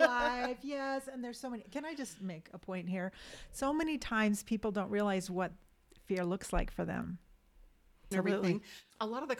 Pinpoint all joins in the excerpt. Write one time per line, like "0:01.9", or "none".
0:08.1